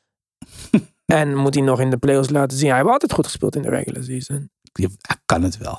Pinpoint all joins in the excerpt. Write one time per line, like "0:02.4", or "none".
0:04.6